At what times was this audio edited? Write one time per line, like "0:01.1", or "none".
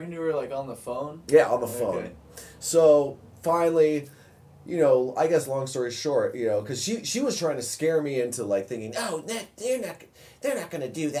none